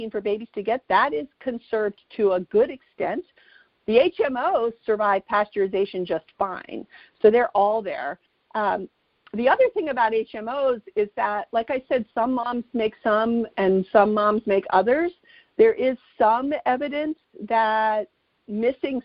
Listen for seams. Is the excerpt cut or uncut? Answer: uncut